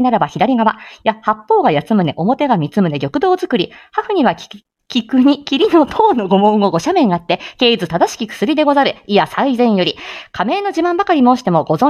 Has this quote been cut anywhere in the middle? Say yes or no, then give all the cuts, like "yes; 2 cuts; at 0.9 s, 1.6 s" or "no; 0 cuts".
no; 0 cuts